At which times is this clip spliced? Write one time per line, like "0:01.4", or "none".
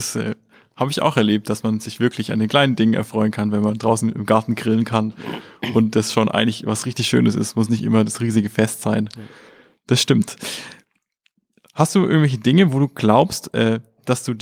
none